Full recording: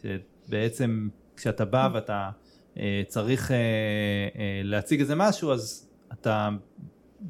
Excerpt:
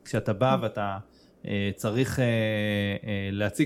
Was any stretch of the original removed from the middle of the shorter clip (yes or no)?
no